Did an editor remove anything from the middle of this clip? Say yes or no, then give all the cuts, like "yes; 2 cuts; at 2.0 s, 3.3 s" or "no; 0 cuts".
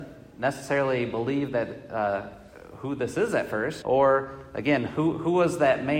yes; 1 cut; at 3.8 s